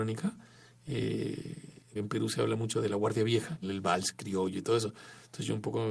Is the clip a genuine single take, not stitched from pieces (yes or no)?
no